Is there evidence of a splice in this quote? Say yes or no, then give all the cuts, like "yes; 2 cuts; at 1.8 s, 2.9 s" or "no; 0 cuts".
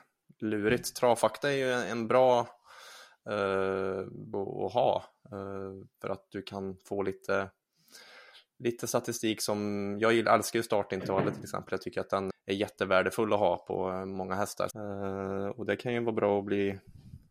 yes; 3 cuts; at 4.3 s, 12.3 s, 14.7 s